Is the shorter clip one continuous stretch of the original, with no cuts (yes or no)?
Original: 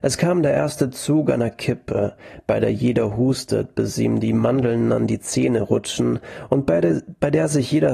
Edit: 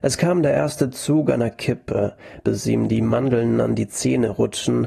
no